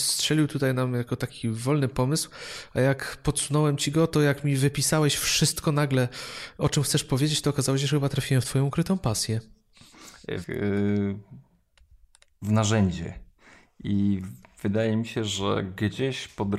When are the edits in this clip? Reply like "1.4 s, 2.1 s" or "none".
10.4 s